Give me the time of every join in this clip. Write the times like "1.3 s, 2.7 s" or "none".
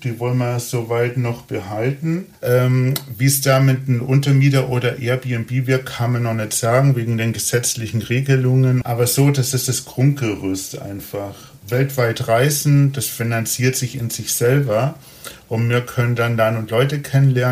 2.3 s, 8.8 s